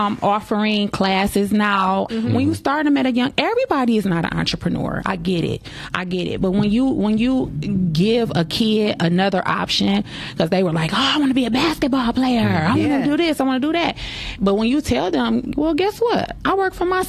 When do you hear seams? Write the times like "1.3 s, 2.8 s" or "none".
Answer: 2.1 s